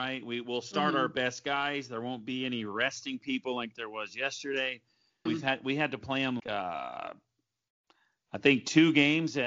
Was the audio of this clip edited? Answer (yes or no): yes